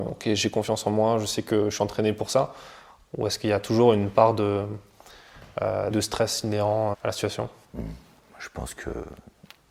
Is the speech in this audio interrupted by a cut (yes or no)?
yes